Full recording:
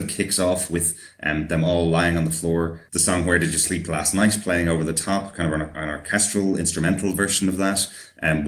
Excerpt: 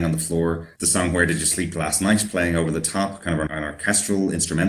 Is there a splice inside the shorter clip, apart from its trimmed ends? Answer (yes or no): yes